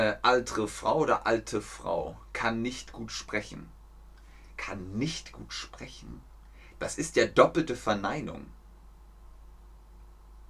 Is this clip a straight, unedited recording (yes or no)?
yes